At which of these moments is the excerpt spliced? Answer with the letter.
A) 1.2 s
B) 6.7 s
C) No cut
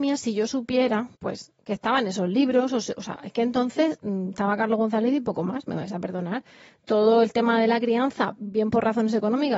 A